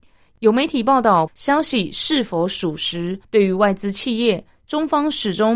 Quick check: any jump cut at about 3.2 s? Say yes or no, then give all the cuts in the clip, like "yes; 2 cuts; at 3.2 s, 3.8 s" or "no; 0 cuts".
yes; 2 cuts; at 1.3 s, 3.2 s